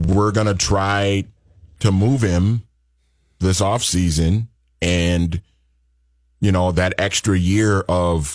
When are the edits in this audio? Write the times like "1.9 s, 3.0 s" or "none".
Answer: none